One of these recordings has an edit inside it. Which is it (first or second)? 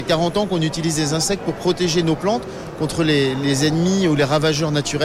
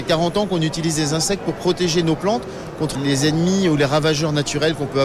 second